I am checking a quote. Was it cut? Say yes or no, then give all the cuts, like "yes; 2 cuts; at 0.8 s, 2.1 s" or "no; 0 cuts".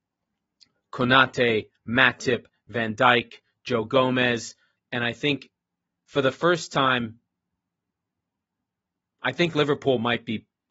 yes; 1 cut; at 4.8 s